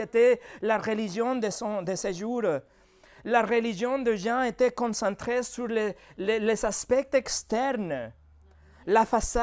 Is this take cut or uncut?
uncut